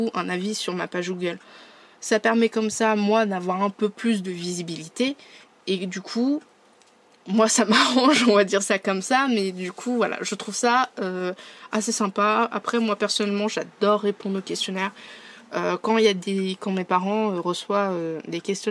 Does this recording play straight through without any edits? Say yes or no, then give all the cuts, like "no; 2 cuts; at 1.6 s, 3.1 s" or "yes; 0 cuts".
yes; 0 cuts